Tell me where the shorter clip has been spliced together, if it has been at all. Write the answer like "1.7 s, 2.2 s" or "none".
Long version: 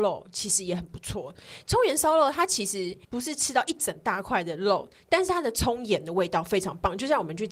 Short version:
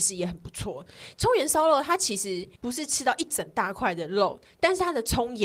none